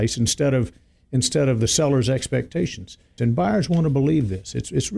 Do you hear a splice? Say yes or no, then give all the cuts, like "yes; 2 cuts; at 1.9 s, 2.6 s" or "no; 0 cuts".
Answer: yes; 1 cut; at 3.2 s